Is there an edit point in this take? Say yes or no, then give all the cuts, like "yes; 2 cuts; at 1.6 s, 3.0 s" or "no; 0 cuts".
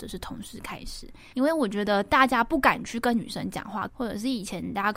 yes; 2 cuts; at 1.3 s, 3.9 s